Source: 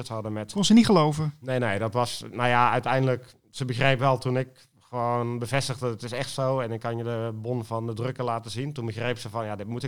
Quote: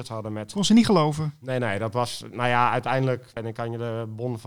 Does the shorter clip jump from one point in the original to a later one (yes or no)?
yes